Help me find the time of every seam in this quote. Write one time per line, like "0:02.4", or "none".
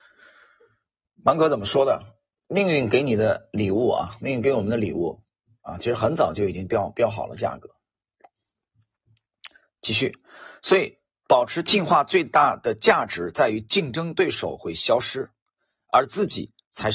none